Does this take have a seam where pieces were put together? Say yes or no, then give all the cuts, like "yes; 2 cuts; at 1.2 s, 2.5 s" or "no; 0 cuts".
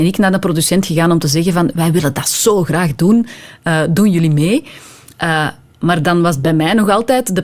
no; 0 cuts